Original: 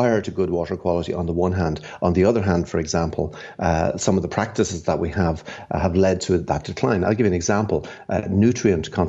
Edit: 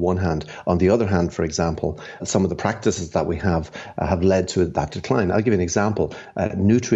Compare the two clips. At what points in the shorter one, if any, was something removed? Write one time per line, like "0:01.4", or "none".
0:02.2